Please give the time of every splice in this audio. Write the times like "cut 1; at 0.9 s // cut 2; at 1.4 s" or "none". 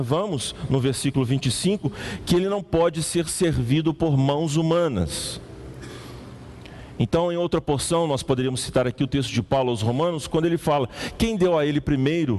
none